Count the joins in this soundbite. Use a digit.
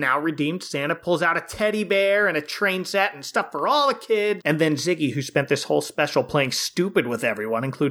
1